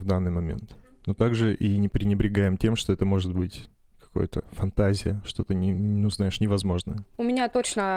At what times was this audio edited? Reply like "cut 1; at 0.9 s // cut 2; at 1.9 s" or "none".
none